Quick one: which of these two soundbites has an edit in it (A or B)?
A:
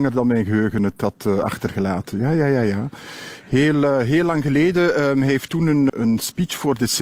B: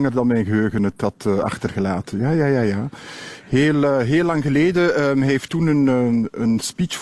A